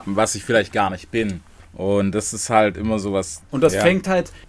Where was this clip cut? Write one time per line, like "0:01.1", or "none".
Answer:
0:03.4